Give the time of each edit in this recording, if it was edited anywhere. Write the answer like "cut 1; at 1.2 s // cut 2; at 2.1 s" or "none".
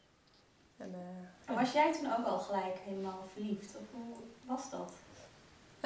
none

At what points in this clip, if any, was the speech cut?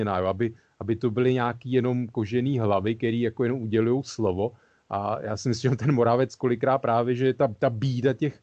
none

